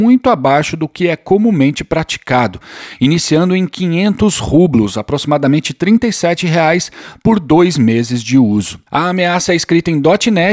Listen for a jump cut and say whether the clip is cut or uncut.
cut